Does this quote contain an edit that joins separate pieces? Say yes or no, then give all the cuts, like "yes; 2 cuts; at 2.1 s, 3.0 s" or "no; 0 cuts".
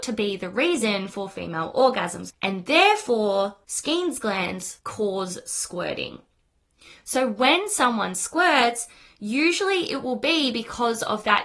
no; 0 cuts